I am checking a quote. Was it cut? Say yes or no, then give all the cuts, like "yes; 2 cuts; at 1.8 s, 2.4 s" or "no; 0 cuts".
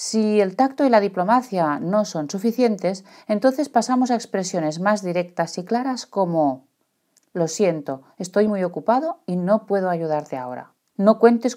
no; 0 cuts